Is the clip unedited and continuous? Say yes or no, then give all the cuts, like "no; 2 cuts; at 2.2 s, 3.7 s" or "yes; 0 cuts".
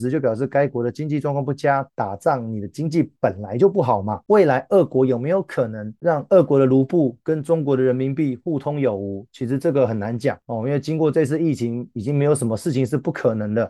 no; 1 cut; at 1.9 s